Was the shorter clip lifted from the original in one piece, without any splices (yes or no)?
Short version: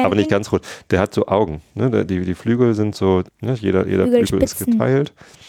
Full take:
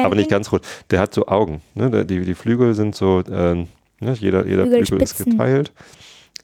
no